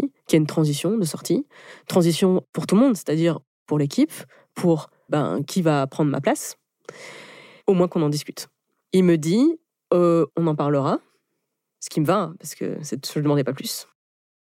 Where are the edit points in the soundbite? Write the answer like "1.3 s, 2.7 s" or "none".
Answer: 5.1 s, 7.6 s, 10.3 s